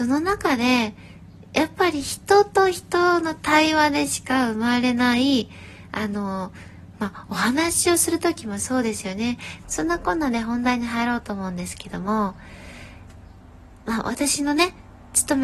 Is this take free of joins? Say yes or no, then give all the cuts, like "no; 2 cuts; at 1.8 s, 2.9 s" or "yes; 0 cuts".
no; 1 cut; at 9.6 s